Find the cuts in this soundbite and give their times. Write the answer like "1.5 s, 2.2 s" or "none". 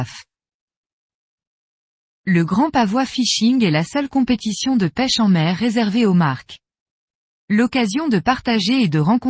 2.1 s